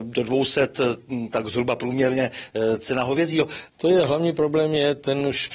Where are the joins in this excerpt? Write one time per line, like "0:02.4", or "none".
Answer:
0:03.7